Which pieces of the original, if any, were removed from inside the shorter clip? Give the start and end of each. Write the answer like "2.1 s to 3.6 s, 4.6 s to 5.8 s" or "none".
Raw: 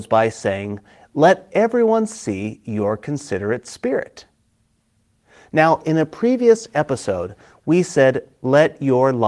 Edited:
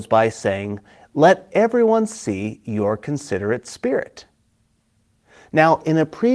none